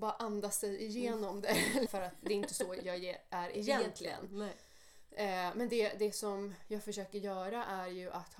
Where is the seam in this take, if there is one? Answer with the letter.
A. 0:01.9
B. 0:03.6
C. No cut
A